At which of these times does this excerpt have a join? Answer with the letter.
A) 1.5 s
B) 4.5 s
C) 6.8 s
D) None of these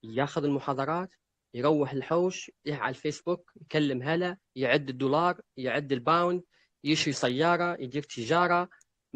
B